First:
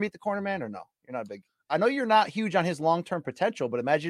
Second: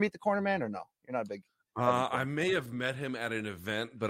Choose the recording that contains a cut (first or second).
first